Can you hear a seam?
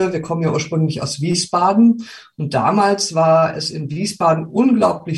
no; 0 cuts

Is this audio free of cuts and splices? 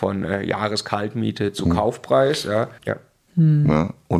no; 1 cut; at 2.8 s

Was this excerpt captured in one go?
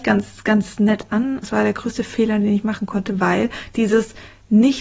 no; 1 cut; at 1.4 s

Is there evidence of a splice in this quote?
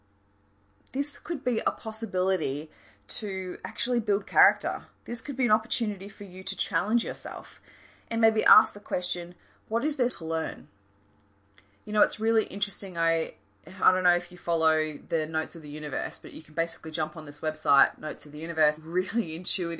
yes; 2 cuts; at 10.1 s, 18.8 s

